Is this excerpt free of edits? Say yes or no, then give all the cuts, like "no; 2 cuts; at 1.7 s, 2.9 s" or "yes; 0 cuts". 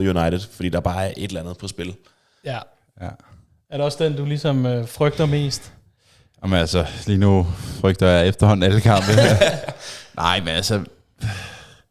yes; 0 cuts